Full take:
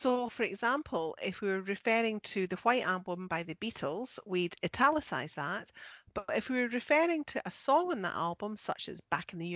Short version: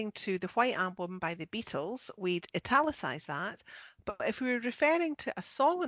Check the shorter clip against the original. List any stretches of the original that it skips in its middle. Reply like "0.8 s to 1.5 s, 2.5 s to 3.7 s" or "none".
none